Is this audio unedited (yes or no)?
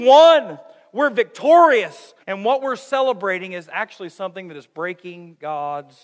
no